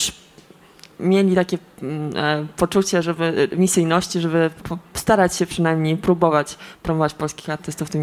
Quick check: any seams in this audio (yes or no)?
yes